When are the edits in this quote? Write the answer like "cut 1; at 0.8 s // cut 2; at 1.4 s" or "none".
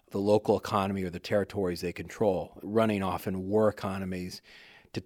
cut 1; at 2.6 s